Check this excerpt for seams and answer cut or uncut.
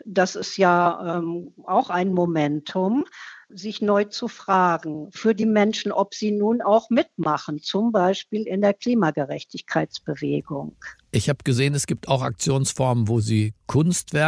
uncut